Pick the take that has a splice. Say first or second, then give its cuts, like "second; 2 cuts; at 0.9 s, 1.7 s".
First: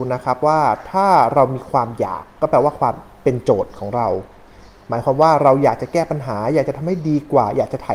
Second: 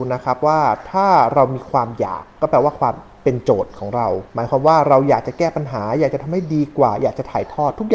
second; 1 cut; at 4.3 s